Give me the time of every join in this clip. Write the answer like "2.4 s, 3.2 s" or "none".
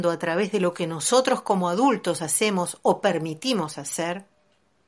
none